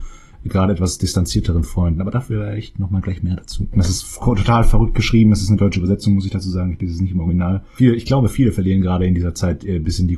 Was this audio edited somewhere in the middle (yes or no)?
yes